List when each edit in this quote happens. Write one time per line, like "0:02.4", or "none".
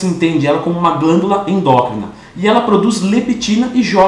none